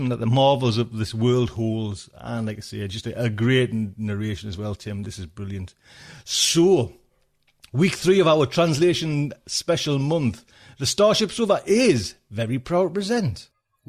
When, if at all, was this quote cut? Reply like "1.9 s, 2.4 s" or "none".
none